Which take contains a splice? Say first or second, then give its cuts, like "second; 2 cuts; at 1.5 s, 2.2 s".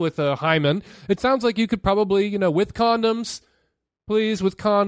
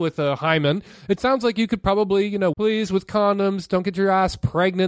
second; 1 cut; at 2.5 s